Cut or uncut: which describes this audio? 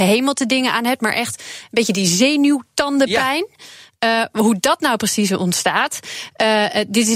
uncut